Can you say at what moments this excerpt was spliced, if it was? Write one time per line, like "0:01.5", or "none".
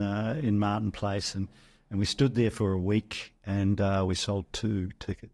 none